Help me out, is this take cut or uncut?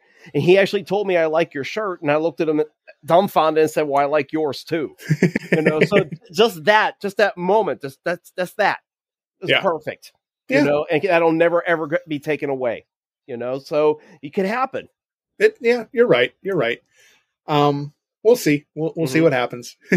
cut